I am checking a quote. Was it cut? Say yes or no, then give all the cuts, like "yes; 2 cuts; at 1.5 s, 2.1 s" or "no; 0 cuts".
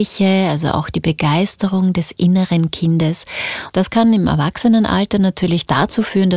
yes; 1 cut; at 3.7 s